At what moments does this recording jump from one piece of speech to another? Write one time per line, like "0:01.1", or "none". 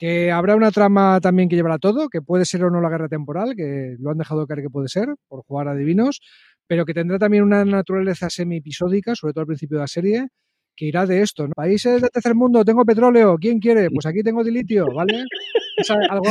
0:11.5